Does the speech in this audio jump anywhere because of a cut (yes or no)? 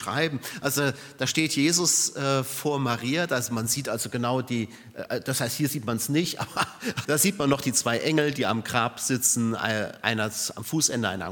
yes